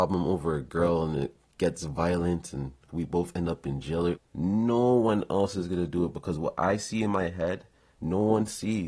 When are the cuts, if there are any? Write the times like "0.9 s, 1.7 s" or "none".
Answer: 4.2 s